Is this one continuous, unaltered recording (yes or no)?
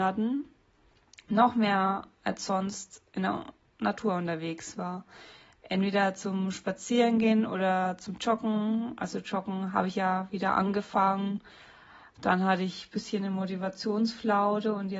yes